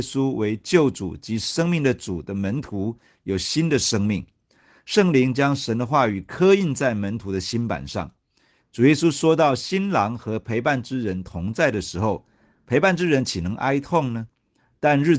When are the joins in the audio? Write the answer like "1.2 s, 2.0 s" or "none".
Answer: 8.6 s